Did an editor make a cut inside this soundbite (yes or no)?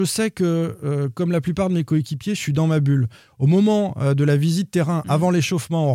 no